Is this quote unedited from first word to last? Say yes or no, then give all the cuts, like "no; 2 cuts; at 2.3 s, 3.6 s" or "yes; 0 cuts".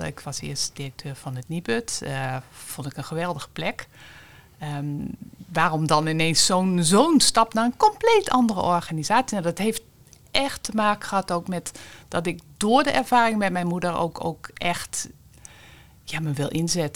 yes; 0 cuts